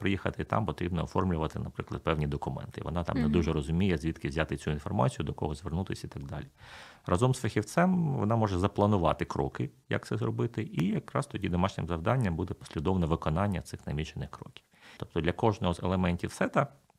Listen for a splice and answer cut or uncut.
cut